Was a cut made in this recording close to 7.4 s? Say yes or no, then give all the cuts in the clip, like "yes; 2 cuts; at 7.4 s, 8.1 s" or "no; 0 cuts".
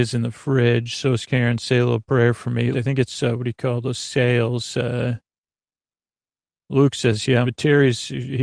yes; 2 cuts; at 2.7 s, 7.4 s